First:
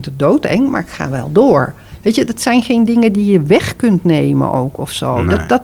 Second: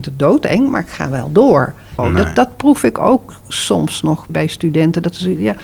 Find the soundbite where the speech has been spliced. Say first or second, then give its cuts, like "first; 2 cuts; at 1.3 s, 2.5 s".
second; 2 cuts; at 2.0 s, 4.3 s